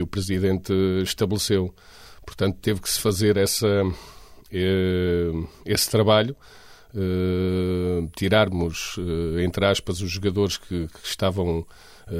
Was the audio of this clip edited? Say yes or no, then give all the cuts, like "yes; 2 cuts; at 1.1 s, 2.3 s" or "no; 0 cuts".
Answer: no; 0 cuts